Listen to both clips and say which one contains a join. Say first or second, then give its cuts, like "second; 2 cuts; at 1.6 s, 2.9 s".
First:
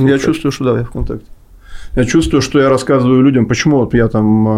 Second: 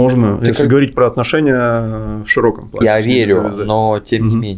second; 1 cut; at 2.8 s